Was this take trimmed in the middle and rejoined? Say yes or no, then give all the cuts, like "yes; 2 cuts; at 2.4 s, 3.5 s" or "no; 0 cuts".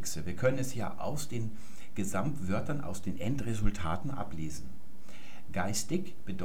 no; 0 cuts